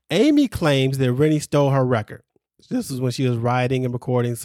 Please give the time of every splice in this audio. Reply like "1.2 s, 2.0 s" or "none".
2.6 s